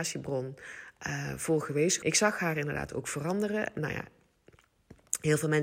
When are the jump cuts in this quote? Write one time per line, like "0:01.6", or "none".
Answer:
0:02.0

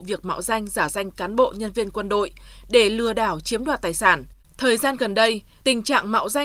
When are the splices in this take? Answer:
0:04.4

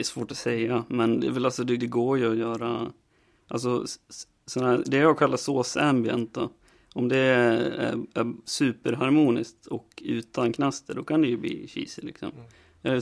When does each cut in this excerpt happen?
0:01.8

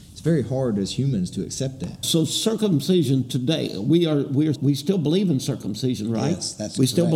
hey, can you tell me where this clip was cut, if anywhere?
0:02.0
0:04.5

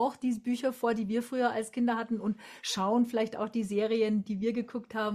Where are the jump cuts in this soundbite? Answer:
none

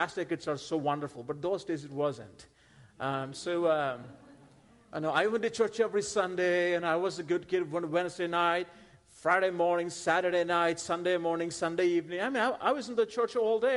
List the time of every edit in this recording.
none

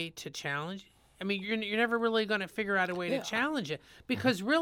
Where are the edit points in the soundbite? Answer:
0:01.4

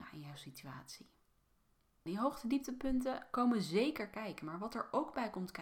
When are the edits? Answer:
0:02.1

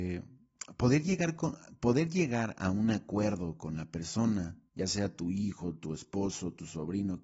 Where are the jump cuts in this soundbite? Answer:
0:04.7

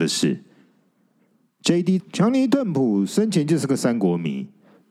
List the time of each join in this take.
0:02.0

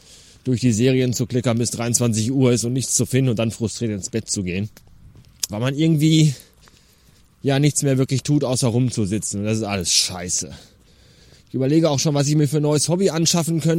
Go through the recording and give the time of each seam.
0:05.5

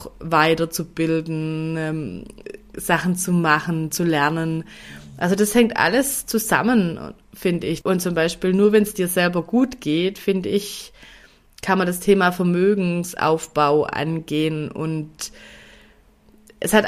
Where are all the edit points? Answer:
0:07.8

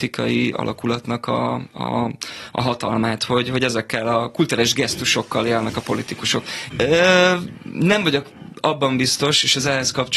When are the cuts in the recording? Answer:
0:06.7

